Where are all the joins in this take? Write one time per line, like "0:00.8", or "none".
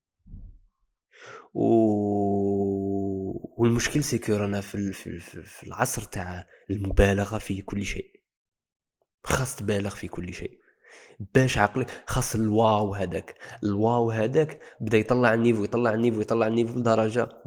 0:04.9